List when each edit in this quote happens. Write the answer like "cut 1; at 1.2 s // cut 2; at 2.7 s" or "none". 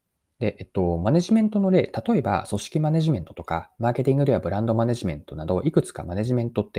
none